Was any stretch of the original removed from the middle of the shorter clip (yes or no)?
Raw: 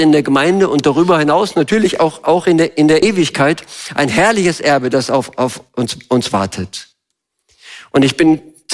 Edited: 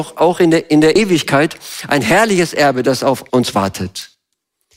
yes